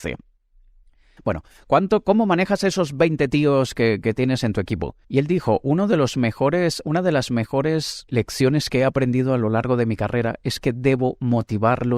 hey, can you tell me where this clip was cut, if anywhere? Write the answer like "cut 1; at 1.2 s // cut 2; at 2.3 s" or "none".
cut 1; at 1.2 s // cut 2; at 5.0 s // cut 3; at 8.1 s